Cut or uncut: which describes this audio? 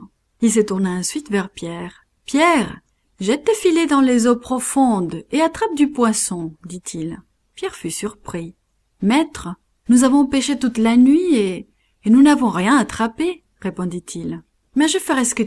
uncut